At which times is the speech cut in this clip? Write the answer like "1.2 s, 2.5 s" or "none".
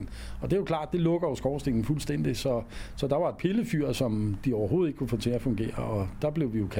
none